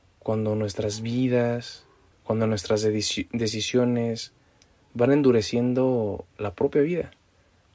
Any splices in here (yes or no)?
yes